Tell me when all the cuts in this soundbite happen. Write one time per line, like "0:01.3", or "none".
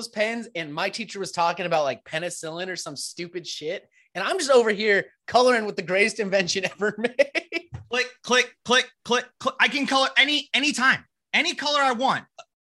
none